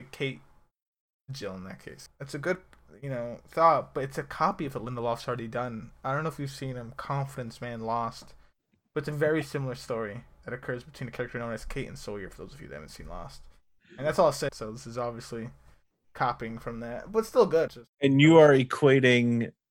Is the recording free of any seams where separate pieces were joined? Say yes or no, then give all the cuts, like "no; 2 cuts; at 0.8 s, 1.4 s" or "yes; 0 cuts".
no; 3 cuts; at 2.1 s, 14.5 s, 17.7 s